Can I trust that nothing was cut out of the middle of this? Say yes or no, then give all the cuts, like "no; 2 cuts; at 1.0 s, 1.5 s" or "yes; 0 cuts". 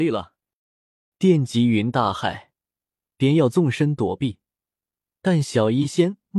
no; 1 cut; at 1.1 s